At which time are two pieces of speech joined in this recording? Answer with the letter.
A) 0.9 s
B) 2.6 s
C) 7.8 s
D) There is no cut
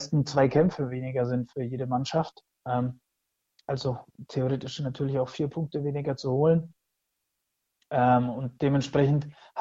D